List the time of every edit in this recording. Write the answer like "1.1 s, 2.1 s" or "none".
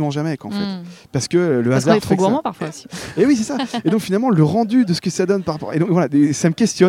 none